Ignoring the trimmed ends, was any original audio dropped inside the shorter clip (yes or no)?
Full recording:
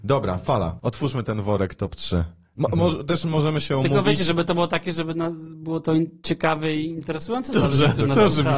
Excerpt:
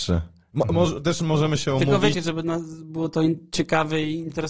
yes